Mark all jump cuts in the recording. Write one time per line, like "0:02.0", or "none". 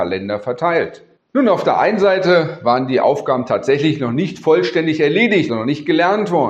0:01.2
0:05.5